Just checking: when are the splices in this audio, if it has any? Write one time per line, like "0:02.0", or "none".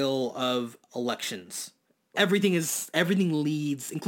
0:02.1